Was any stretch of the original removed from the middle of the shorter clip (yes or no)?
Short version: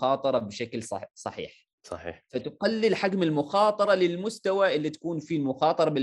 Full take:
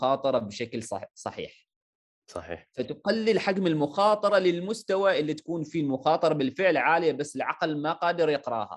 yes